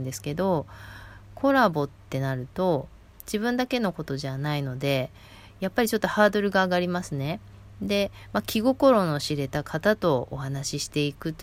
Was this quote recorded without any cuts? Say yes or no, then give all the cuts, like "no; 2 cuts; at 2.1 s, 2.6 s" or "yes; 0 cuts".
yes; 0 cuts